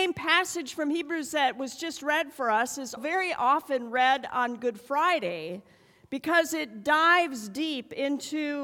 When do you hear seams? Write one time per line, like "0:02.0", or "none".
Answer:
0:03.0

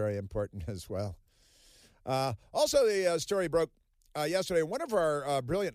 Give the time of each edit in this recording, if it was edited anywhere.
none

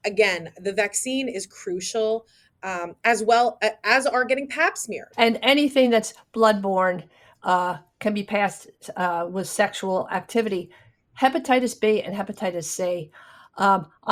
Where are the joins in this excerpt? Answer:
0:05.1

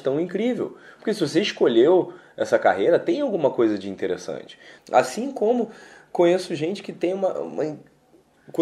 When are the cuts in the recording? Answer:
0:04.8
0:07.3

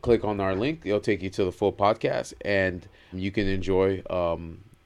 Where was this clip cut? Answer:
0:03.1

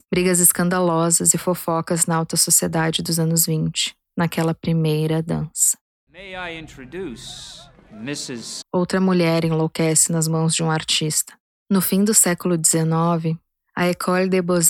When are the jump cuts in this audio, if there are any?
0:08.6

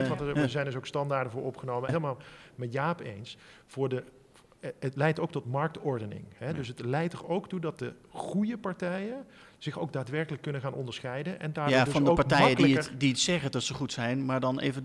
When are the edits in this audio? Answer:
0:01.9

